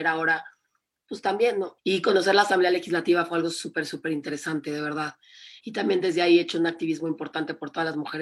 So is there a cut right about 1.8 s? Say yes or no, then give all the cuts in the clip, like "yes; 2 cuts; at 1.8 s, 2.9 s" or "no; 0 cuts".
yes; 2 cuts; at 1.8 s, 5.6 s